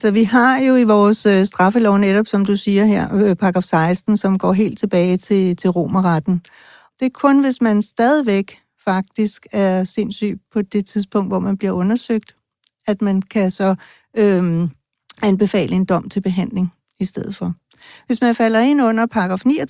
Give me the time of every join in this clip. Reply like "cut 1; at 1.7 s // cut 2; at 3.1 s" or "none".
cut 1; at 6.9 s